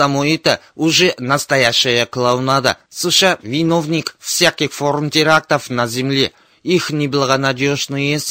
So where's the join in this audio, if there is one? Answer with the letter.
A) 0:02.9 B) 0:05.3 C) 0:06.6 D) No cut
A